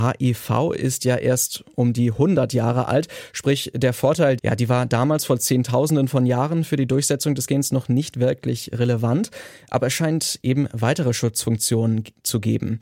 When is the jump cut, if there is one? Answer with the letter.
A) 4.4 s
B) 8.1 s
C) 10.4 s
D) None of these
A